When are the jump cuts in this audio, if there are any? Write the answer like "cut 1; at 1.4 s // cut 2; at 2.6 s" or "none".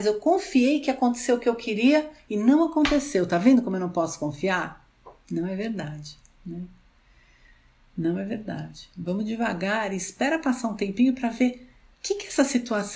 none